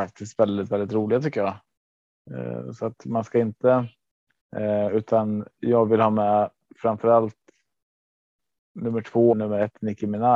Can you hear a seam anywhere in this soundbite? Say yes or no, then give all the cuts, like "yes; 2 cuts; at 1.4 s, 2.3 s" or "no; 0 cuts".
yes; 2 cuts; at 4.4 s, 9.3 s